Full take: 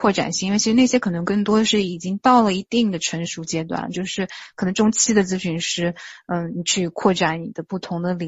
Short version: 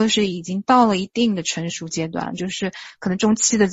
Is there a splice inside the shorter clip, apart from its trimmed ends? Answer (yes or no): no